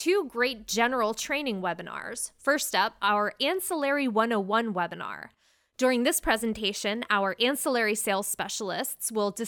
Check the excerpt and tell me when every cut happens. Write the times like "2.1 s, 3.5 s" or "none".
none